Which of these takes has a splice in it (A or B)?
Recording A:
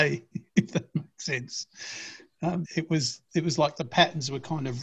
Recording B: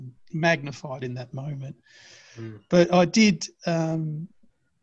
A